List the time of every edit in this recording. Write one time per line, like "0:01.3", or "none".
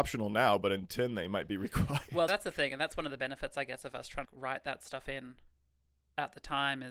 0:02.3
0:04.2